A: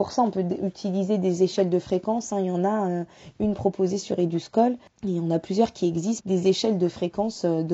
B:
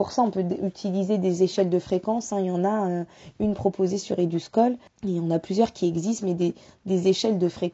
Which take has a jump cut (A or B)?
A